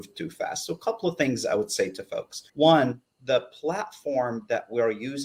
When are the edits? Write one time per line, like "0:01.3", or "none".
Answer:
0:02.5